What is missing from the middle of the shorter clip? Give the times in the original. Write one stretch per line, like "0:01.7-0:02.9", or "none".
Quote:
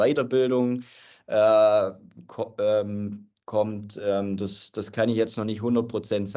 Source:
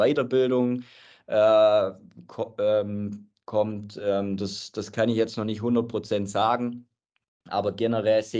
none